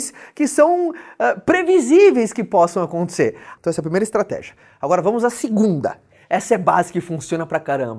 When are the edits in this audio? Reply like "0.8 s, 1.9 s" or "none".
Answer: 3.6 s